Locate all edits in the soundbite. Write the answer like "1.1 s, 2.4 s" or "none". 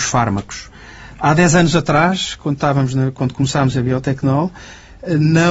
none